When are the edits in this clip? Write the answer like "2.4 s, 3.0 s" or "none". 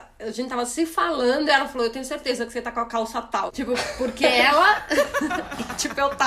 3.5 s